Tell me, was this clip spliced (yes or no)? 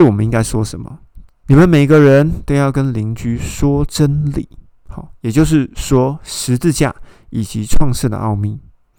yes